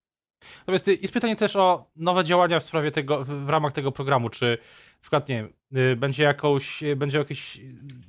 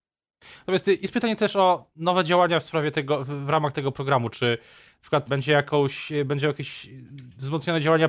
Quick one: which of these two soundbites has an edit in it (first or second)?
second